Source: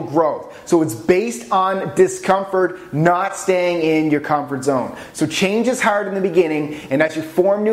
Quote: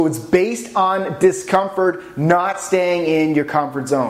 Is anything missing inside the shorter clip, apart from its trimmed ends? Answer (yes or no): no